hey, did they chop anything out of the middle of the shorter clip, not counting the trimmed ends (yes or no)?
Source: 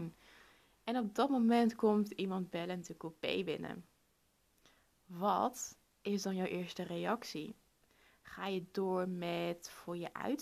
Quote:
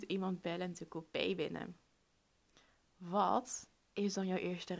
no